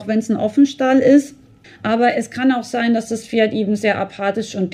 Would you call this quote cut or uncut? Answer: cut